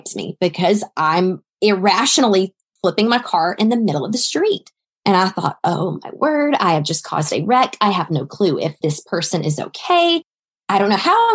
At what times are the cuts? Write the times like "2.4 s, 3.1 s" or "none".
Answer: none